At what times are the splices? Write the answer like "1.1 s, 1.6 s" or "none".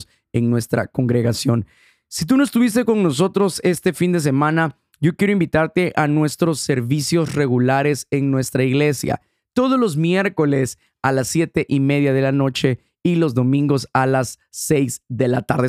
none